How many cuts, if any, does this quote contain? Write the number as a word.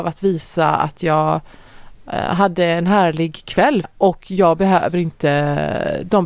one